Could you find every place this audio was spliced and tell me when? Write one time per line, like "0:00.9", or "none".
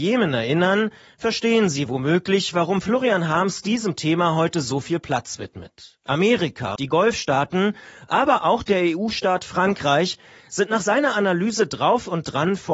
0:06.8